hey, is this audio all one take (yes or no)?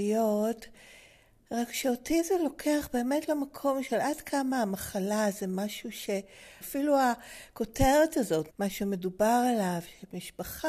no